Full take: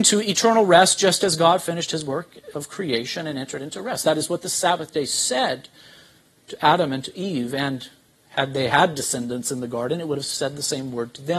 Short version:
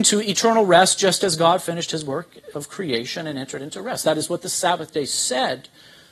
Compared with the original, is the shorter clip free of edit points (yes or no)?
yes